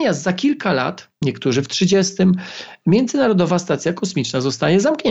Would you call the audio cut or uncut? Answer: cut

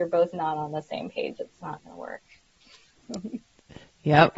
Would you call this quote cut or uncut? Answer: uncut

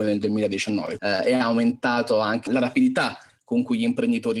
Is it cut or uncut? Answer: cut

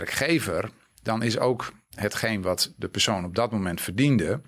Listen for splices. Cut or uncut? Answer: uncut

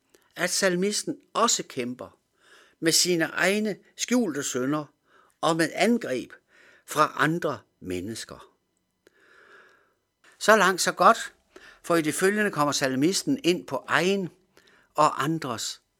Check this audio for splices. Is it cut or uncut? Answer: cut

